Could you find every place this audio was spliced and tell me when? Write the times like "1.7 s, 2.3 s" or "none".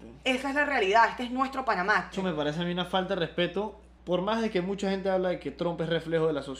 2.1 s, 4.0 s